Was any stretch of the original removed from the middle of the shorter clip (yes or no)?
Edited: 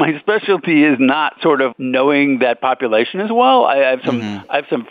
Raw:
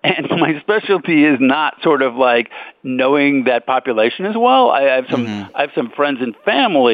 yes